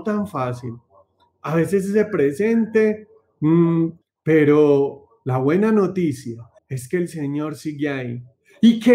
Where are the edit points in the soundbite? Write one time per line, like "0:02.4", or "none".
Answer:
0:04.0
0:06.6